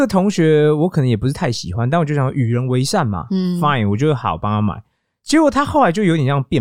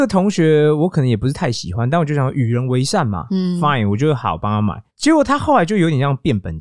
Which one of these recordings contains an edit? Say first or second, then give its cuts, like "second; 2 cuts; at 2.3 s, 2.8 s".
second; 1 cut; at 4.9 s